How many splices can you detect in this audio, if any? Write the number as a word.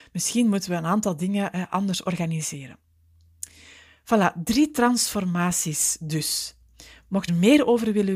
one